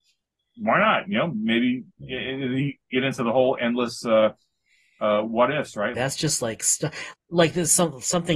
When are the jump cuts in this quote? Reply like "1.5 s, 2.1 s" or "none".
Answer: 5.9 s, 7.1 s